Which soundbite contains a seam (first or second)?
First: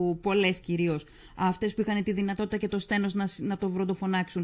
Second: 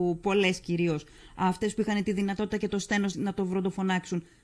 second